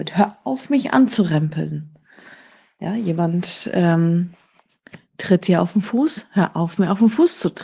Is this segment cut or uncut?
uncut